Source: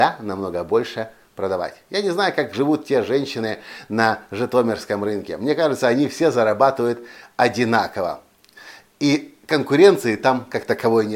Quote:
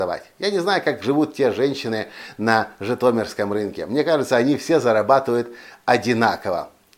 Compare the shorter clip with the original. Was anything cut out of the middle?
no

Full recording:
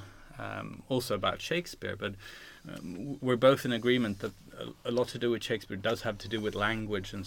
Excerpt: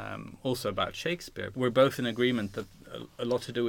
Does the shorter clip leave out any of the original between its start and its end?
yes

